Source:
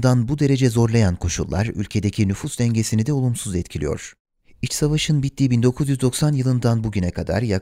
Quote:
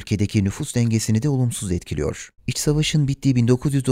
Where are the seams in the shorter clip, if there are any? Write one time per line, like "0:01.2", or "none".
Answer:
0:02.4